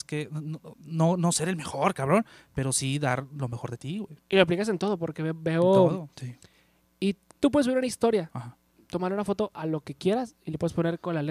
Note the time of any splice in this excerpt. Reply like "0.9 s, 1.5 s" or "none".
6.1 s